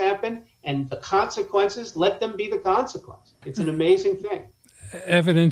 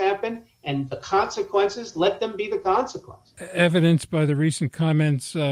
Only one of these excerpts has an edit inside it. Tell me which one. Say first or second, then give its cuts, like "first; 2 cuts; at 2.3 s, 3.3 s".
second; 1 cut; at 3.4 s